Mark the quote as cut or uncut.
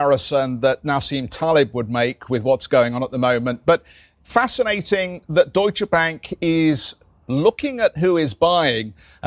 uncut